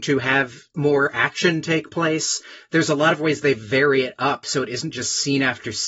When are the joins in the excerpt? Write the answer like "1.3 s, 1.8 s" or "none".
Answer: none

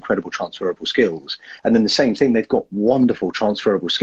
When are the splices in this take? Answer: 1.6 s

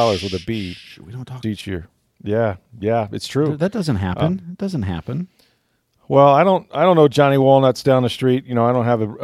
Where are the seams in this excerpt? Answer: 1.4 s

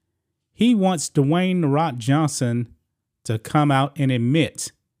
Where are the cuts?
none

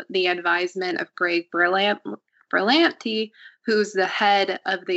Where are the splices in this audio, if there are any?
none

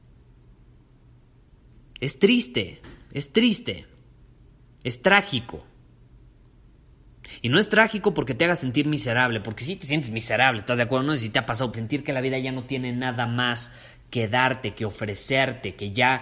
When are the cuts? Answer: 11.7 s

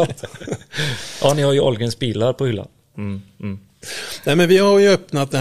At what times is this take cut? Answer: 2.9 s

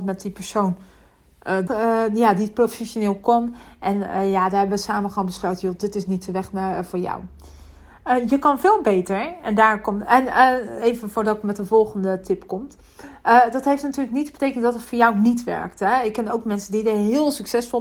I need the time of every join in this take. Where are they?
1.7 s

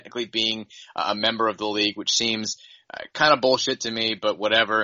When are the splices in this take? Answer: none

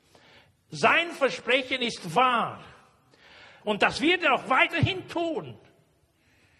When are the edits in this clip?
3.6 s

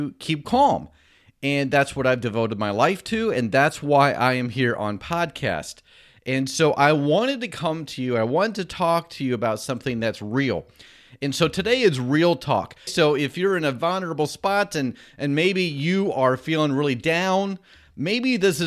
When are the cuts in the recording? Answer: 12.9 s

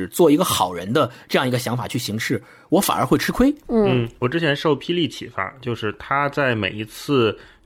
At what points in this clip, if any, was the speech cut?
3.6 s

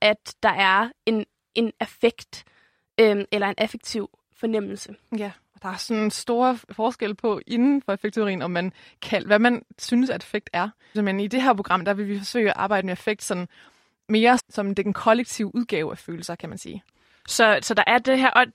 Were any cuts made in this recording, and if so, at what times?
10.9 s, 14.4 s

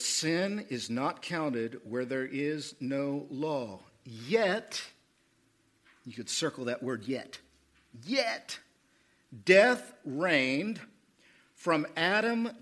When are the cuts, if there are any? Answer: none

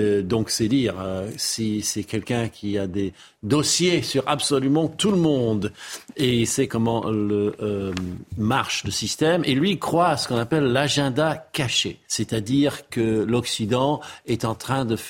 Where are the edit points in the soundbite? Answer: 8.3 s, 12.0 s

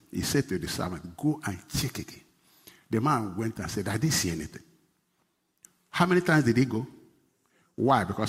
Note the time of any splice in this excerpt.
none

